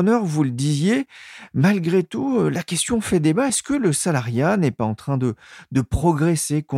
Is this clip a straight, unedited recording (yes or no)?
yes